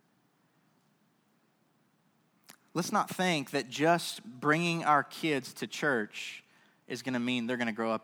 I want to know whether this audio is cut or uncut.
uncut